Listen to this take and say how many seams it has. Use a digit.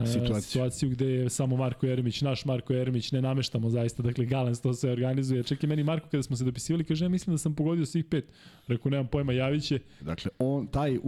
1